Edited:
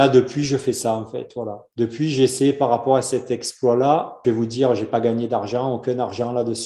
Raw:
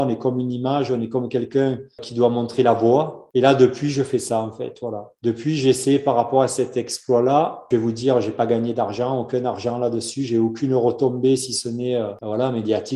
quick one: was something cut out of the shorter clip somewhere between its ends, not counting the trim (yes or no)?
no